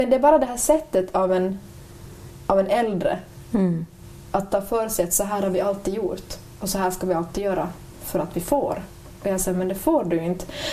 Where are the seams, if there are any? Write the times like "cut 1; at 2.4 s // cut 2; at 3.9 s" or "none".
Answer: none